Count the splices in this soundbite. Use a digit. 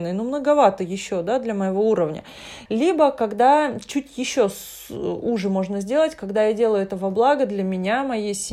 1